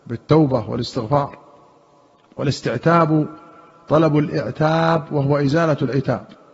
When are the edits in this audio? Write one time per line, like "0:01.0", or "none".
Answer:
none